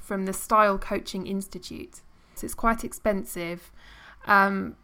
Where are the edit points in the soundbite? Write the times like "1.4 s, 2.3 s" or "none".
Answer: 2.4 s